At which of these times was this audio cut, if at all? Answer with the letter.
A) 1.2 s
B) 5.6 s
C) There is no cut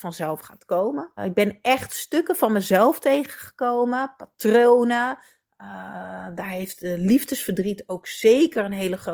A